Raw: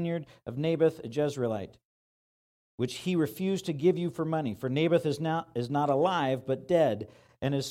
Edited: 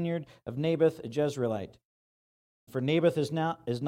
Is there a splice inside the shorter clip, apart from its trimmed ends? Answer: yes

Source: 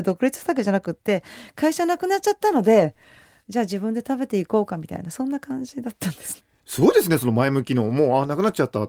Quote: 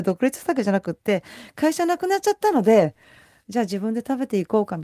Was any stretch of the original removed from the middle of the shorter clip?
no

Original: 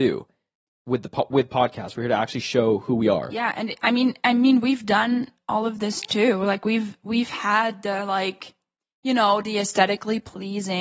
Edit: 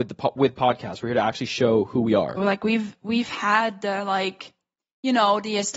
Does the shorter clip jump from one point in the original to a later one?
yes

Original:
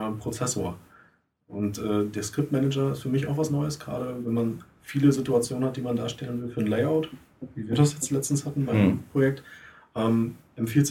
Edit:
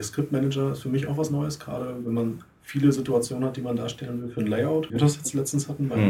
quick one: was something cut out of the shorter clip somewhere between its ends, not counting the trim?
yes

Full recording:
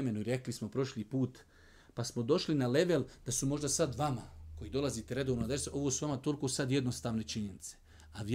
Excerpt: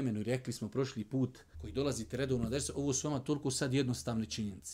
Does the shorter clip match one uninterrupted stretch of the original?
no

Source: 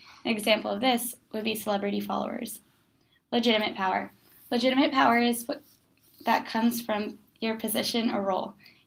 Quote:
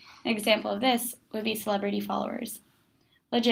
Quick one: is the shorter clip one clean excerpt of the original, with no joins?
yes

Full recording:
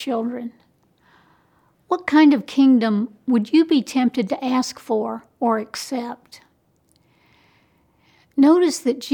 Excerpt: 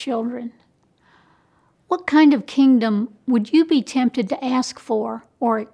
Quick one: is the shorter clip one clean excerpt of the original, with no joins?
yes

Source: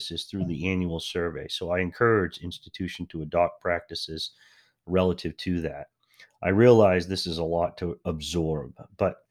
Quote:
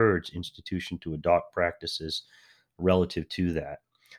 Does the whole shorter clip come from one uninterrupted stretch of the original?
yes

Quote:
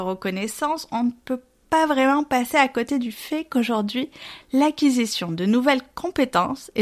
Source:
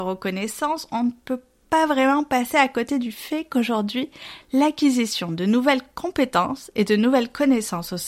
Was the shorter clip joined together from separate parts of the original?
no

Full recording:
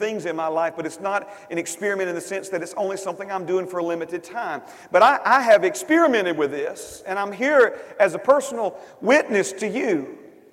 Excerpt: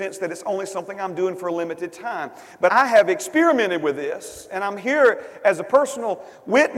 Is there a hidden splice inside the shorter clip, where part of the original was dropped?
yes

